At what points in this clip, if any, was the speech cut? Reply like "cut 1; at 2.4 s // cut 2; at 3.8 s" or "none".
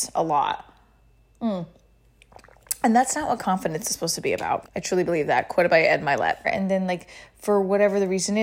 cut 1; at 4.6 s // cut 2; at 6.4 s